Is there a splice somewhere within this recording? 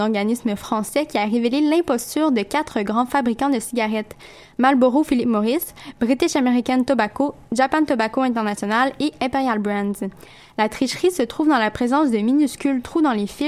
no; 0 cuts

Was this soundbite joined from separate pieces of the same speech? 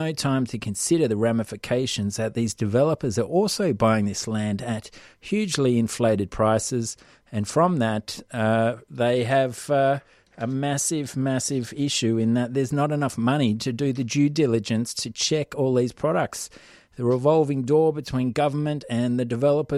no; 0 cuts

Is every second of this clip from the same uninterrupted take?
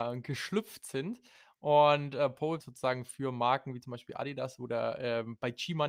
no; 1 cut; at 2.6 s

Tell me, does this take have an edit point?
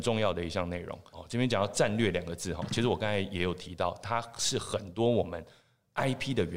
yes; 1 cut; at 1.1 s

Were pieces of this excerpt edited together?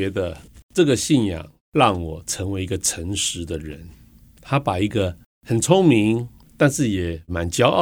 no; 0 cuts

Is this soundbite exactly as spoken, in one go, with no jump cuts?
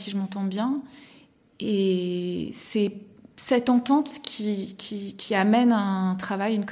yes; 0 cuts

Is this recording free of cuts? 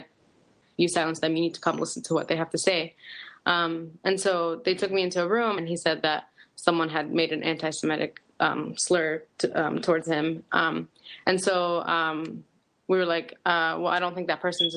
no; 1 cut; at 5.6 s

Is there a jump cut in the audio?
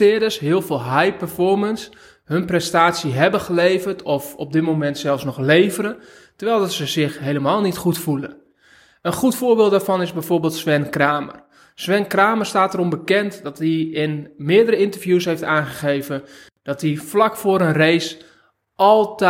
no; 0 cuts

